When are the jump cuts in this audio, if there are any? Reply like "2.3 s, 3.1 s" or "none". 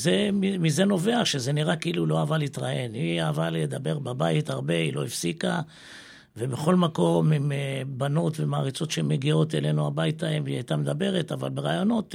none